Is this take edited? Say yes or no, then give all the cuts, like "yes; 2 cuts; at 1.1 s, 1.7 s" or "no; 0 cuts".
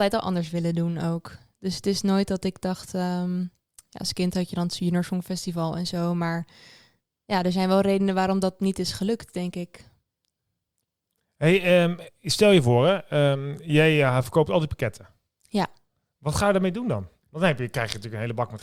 no; 0 cuts